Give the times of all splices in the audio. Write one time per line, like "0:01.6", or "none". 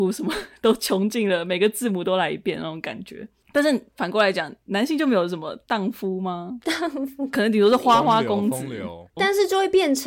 0:09.2